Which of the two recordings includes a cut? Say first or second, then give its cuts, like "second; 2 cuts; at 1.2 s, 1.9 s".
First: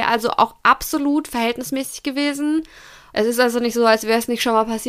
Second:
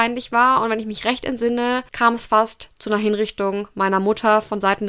first; 1 cut; at 3.1 s